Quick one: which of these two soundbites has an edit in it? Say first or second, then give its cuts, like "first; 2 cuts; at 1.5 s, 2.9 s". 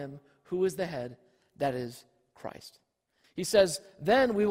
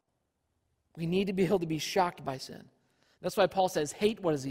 first; 1 cut; at 3.2 s